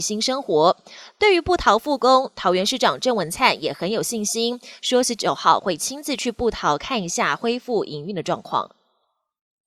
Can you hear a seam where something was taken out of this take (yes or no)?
no